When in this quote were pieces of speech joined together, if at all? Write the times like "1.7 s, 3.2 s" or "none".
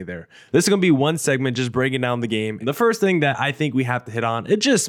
2.6 s